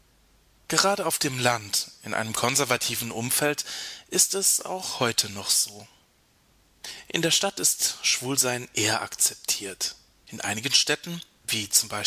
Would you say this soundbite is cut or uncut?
cut